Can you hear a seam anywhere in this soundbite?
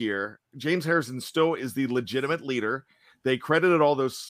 no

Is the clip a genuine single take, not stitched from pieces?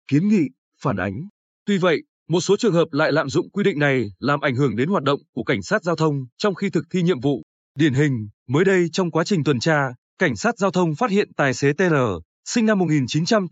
yes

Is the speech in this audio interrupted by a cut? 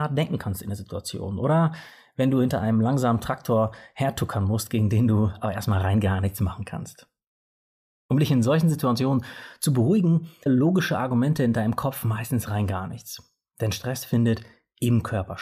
yes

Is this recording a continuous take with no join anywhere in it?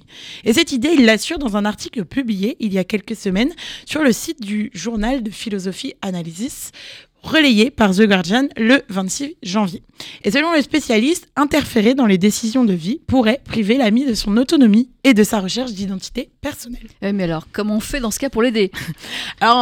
yes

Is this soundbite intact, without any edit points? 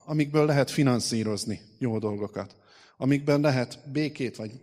yes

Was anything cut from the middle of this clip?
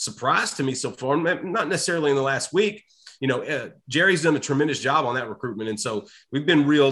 no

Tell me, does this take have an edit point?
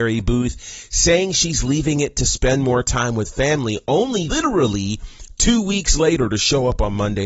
yes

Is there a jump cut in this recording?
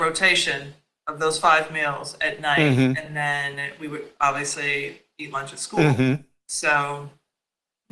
no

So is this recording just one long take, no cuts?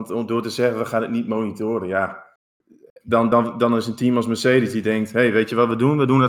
yes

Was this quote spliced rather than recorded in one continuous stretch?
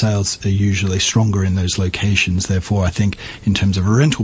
no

